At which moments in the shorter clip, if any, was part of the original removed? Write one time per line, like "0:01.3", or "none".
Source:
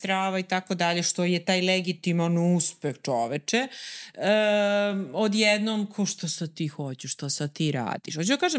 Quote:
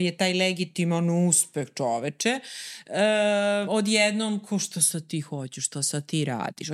0:03.6